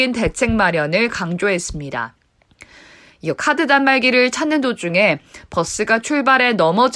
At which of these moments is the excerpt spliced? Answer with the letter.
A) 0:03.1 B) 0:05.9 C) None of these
A